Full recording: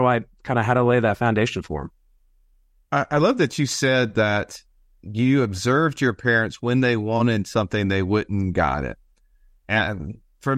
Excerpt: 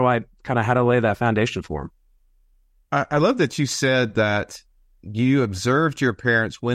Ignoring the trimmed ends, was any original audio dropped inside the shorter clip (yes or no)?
no